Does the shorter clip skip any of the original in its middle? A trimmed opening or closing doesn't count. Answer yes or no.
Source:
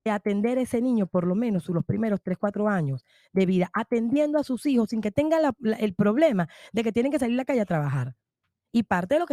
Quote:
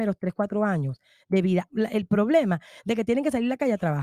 yes